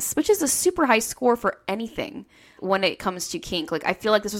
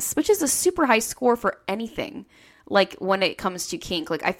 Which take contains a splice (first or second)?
first